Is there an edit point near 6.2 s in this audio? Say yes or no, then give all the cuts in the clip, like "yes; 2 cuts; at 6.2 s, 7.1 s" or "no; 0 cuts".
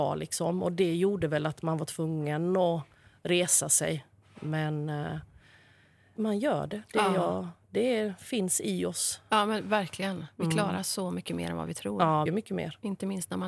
yes; 2 cuts; at 6.2 s, 12.3 s